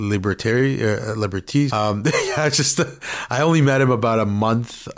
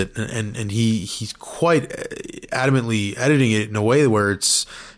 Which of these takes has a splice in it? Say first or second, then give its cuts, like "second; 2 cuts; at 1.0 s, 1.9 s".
first; 1 cut; at 1.7 s